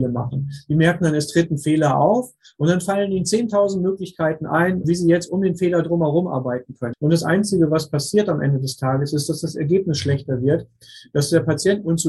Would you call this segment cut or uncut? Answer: cut